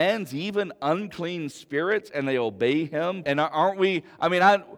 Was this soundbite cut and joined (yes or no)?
yes